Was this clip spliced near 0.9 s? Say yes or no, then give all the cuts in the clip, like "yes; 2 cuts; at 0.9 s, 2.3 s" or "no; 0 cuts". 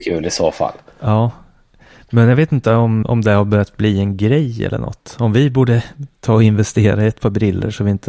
no; 1 cut; at 3.0 s